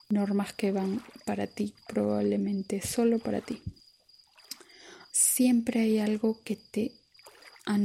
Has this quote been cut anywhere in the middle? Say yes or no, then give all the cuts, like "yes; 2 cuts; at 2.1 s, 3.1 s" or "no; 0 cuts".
yes; 1 cut; at 5.1 s